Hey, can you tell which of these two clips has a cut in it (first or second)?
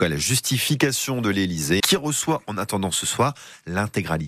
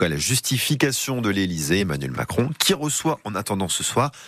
first